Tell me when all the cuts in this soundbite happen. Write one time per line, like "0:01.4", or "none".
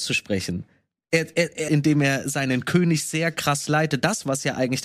0:01.7